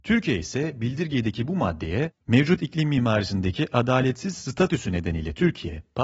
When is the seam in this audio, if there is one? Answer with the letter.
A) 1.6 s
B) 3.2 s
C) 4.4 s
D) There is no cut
D